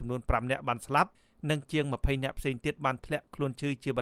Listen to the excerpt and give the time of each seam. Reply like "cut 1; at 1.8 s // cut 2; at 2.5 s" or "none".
none